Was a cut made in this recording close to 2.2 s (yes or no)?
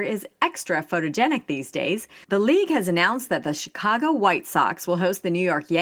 yes